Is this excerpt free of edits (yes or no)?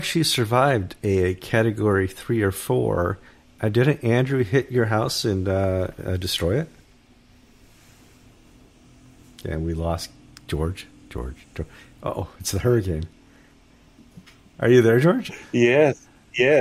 yes